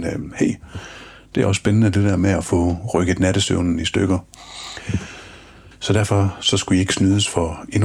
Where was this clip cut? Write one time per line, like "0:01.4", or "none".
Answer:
0:05.7